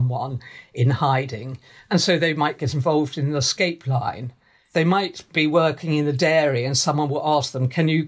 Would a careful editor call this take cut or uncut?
uncut